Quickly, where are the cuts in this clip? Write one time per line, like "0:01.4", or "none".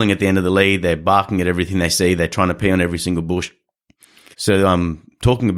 0:04.3